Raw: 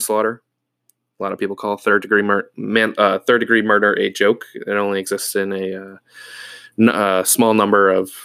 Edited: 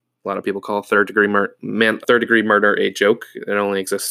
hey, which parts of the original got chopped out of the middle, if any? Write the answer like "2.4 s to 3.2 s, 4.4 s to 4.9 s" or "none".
3.0 s to 3.2 s